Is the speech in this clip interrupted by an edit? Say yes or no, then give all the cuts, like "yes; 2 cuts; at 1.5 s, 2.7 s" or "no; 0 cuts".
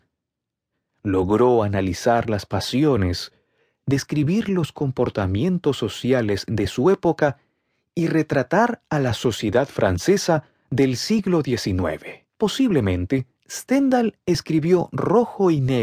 yes; 1 cut; at 12.3 s